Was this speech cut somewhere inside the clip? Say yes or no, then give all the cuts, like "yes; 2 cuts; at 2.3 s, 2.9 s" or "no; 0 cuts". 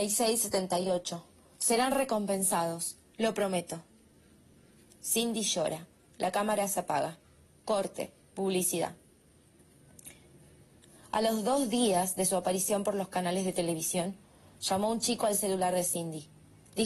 no; 0 cuts